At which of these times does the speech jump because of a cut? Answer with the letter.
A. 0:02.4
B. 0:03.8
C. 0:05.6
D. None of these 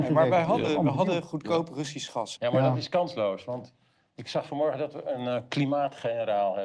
A